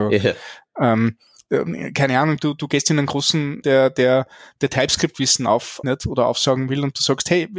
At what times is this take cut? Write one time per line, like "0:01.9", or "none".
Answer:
0:03.6
0:05.8